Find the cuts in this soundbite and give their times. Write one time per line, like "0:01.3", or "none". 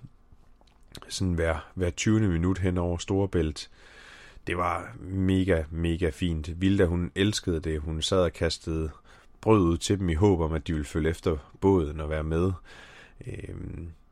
none